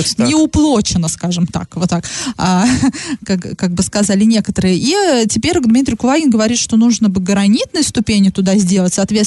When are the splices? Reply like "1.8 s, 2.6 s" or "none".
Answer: none